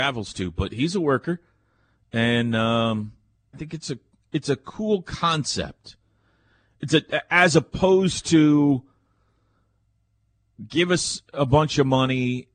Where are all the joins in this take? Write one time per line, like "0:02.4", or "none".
0:03.5